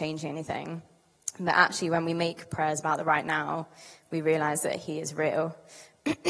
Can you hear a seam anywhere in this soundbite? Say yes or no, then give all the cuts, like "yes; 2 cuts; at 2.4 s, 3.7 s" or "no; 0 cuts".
no; 0 cuts